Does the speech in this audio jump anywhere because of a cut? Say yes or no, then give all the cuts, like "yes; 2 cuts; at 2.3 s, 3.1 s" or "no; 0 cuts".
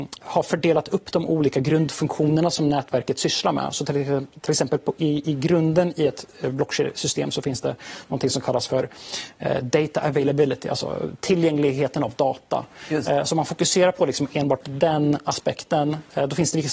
no; 0 cuts